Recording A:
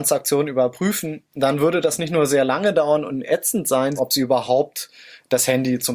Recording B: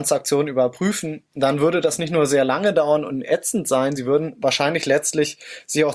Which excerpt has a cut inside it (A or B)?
A